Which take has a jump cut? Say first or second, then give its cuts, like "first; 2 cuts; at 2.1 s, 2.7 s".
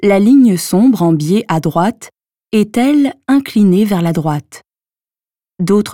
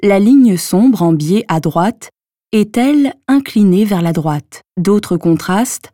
second; 1 cut; at 4.7 s